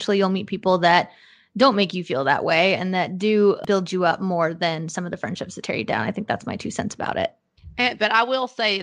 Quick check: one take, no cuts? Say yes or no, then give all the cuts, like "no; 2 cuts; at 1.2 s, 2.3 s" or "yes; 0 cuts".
yes; 0 cuts